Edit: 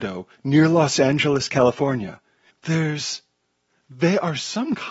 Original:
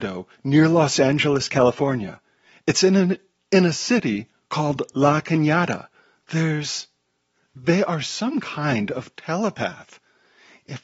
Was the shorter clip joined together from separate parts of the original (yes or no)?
yes